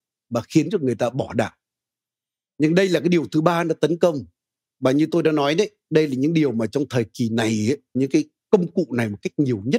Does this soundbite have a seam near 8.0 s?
yes; 1 cut; at 8.0 s

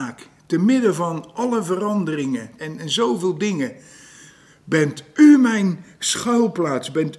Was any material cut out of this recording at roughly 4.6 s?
no; 1 cut; at 2.6 s

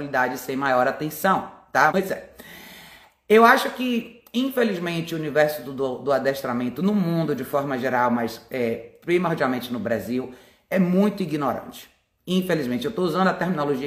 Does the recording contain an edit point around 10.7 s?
no; 1 cut; at 1.9 s

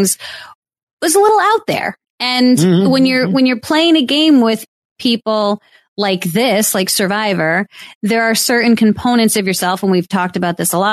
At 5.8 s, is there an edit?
no; 0 cuts

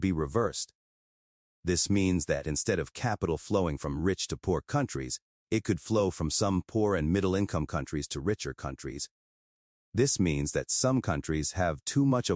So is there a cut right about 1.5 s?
no; 1 cut; at 9.7 s

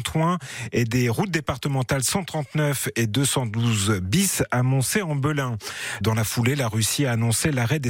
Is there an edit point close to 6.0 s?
yes; 1 cut; at 6.0 s

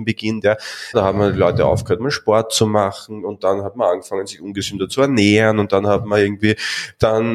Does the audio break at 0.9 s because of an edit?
yes; 1 cut; at 0.9 s

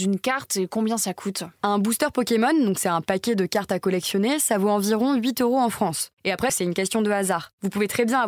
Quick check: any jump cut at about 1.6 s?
yes; 2 cuts; at 1.6 s, 6.5 s

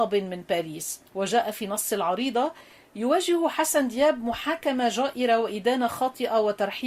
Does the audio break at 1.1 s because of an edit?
yes; 1 cut; at 1.1 s

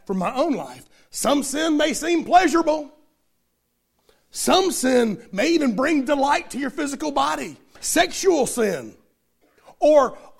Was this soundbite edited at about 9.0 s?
no; 1 cut; at 7.8 s

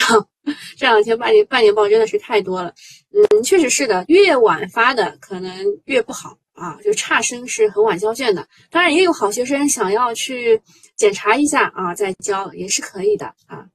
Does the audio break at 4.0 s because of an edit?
yes; 1 cut; at 4.0 s

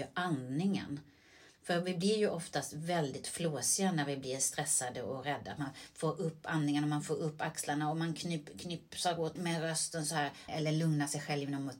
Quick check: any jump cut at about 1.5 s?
no; 2 cuts; at 9.4 s, 10.5 s

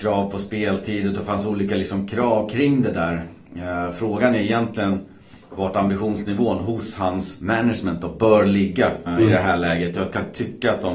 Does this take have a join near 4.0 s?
no; 1 cut; at 9.1 s

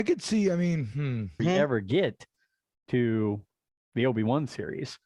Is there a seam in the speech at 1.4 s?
yes; 1 cut; at 1.4 s

